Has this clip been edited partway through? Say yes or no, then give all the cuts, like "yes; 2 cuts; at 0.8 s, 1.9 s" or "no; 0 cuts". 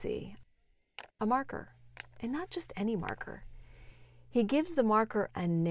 yes; 1 cut; at 1.1 s